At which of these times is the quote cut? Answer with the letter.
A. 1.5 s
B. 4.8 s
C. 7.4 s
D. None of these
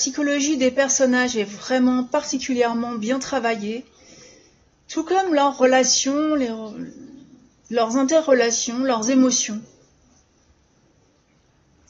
D